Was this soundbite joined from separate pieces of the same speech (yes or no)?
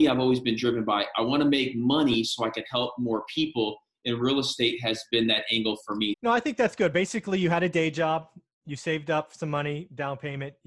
yes